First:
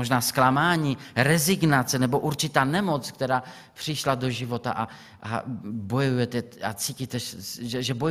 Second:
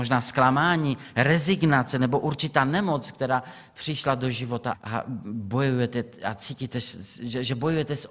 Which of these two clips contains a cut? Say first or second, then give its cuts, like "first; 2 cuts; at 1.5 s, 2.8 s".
second; 1 cut; at 4.7 s